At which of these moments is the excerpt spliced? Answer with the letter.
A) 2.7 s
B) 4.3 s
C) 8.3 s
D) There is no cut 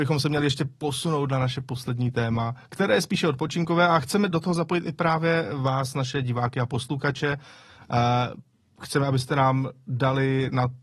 B